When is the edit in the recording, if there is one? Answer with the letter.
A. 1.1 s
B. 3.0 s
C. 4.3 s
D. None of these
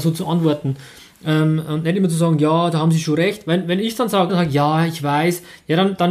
C